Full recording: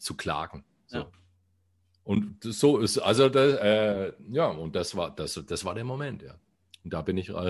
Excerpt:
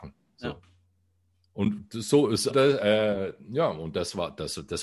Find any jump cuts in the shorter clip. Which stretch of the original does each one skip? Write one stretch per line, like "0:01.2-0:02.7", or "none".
0:03.0-0:03.3